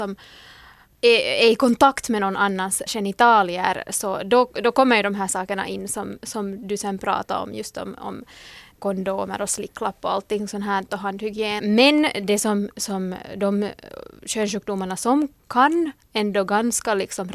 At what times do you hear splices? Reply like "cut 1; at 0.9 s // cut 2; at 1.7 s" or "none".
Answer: cut 1; at 2.9 s // cut 2; at 11.6 s